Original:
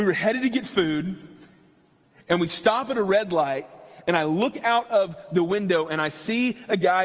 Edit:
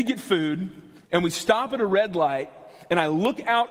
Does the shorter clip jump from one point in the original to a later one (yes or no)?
yes